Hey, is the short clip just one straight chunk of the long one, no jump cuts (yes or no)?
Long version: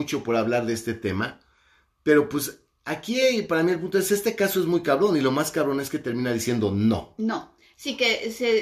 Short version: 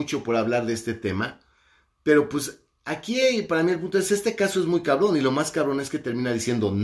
yes